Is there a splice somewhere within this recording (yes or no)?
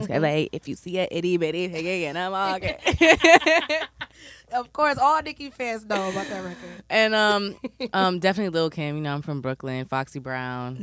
no